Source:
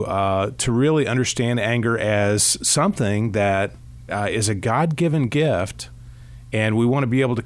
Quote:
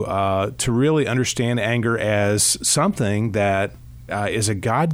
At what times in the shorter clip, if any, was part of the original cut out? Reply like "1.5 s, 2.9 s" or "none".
none